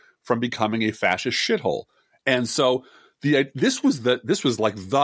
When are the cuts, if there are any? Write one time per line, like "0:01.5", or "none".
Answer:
0:02.2

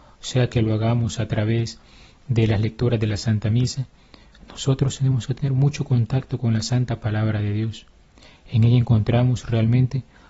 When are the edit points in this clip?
none

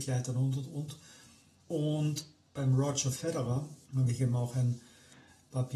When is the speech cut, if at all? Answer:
0:01.6
0:03.8

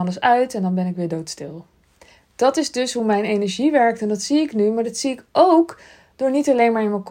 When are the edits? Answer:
none

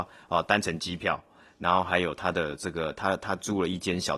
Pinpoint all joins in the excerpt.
none

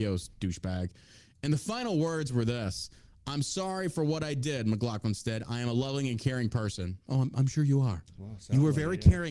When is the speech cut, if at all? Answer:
none

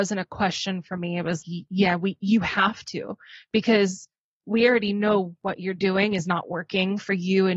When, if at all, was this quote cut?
0:01.4

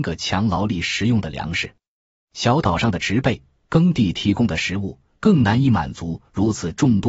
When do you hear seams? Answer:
0:05.1

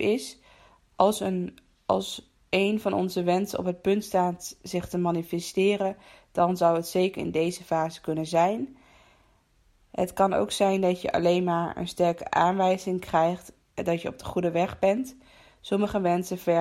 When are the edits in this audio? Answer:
none

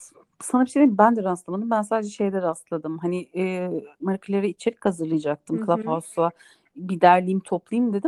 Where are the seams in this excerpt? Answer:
0:04.0

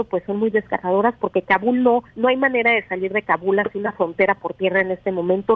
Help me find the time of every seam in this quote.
0:02.1

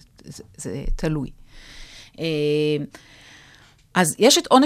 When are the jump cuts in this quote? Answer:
none

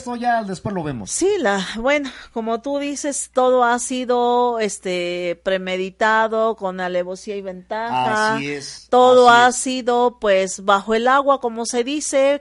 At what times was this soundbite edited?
none

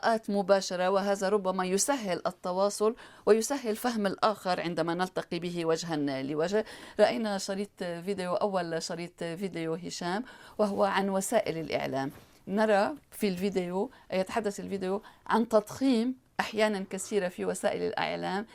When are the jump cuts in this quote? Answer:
none

